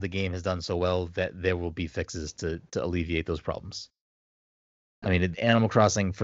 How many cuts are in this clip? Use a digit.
1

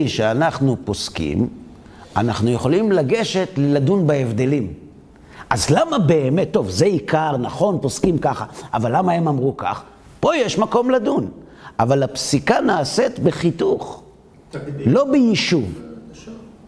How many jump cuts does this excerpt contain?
0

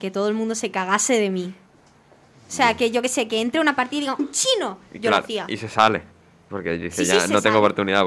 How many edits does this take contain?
1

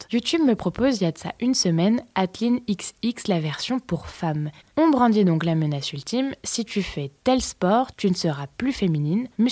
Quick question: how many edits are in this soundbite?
1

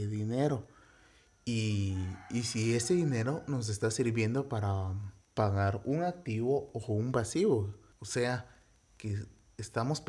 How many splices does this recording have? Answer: 1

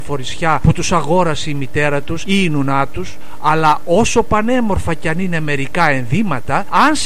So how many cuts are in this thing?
0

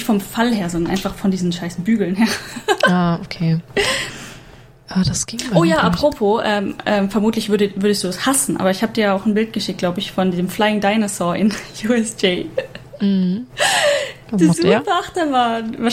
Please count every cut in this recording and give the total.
0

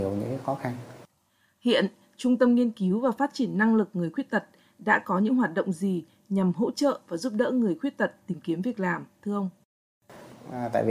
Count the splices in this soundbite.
0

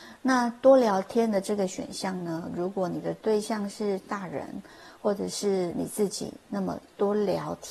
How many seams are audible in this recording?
0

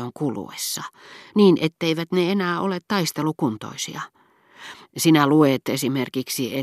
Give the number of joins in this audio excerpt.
1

